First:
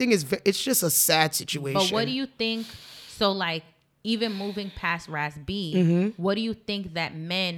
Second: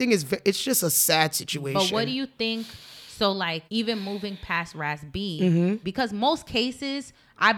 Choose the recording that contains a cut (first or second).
second